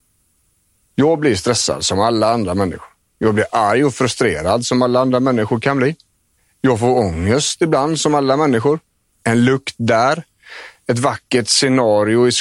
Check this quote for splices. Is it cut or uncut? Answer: cut